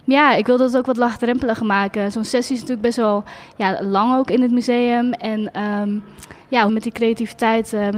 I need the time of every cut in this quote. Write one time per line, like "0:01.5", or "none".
0:06.7